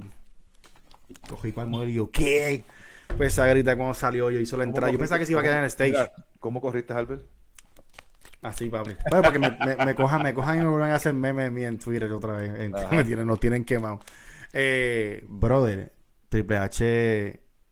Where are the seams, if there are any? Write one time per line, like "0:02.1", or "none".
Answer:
none